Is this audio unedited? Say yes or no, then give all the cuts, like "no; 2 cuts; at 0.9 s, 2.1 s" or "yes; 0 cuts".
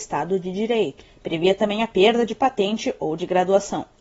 yes; 0 cuts